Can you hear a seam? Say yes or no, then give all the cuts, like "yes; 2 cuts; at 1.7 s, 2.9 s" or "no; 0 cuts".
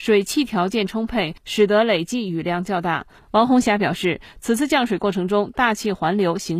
yes; 1 cut; at 3.2 s